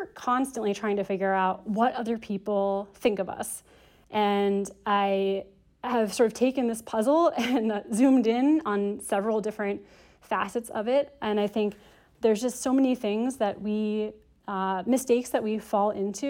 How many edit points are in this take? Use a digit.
0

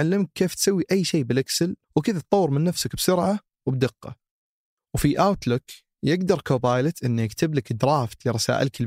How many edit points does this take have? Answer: 1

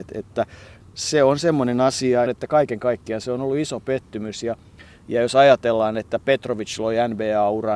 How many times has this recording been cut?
1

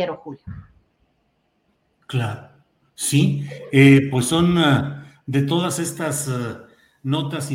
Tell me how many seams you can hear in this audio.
0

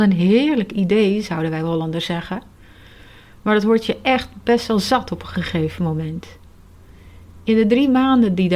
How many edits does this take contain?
0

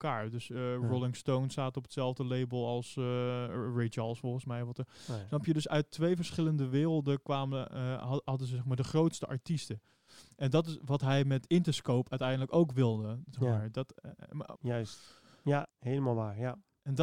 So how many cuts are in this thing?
2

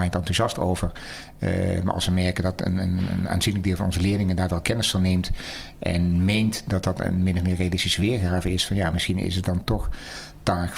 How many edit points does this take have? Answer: 0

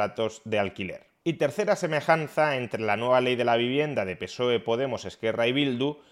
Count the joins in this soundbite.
1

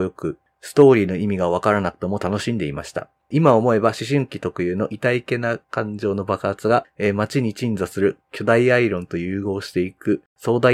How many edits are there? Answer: 0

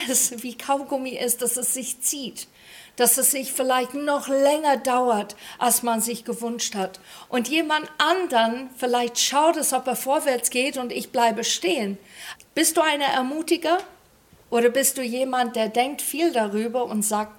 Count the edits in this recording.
2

